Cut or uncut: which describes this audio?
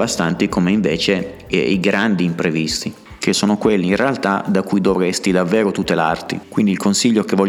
uncut